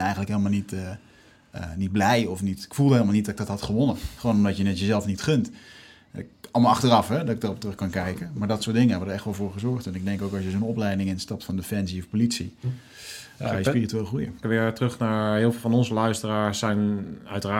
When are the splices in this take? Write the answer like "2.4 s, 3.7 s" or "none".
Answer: 14.4 s